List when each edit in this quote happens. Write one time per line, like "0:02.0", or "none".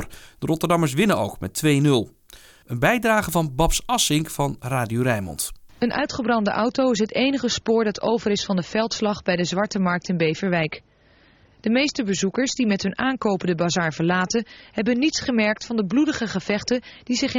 0:02.6